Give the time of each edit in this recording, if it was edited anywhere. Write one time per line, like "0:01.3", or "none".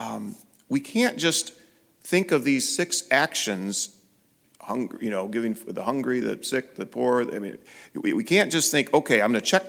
0:06.2